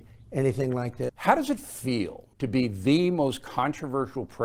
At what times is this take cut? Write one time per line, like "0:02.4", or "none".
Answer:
0:01.1
0:02.3